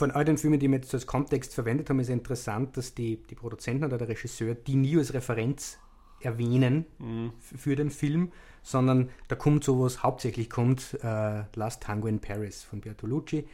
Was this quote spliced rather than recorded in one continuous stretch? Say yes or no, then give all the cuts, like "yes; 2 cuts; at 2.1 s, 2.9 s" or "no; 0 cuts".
no; 0 cuts